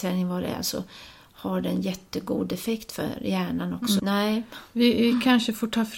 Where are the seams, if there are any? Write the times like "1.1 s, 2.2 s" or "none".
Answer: 4.0 s